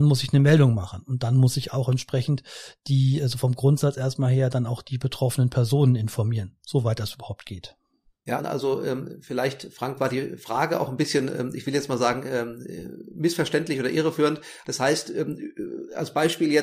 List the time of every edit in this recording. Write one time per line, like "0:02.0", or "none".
0:08.4
0:14.6